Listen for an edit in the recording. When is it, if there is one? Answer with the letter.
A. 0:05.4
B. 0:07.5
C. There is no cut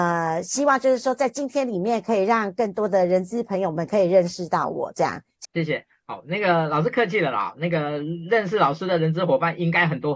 A